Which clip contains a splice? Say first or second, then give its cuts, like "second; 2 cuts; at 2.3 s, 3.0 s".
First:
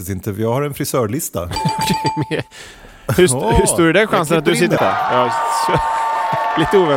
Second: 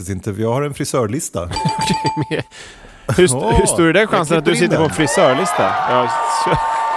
first; 1 cut; at 4.8 s